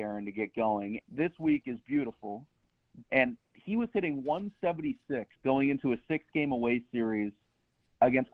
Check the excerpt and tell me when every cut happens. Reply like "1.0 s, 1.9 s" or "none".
1.0 s, 3.0 s, 5.3 s